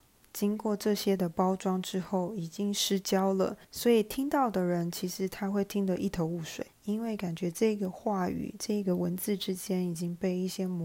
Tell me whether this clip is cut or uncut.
cut